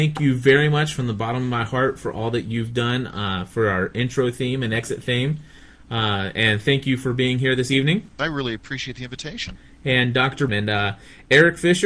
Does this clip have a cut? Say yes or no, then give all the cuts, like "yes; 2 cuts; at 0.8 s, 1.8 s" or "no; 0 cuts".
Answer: yes; 2 cuts; at 8.2 s, 10.5 s